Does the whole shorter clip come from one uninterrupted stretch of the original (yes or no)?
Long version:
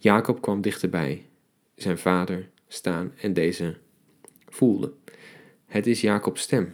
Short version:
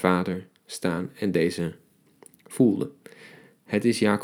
yes